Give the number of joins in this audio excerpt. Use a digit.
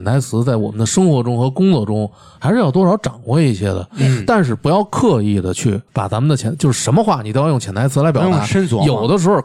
1